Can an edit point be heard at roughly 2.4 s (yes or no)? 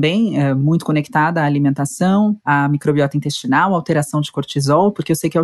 yes